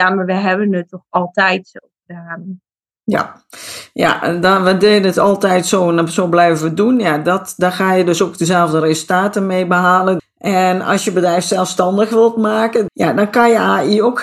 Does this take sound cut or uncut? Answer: cut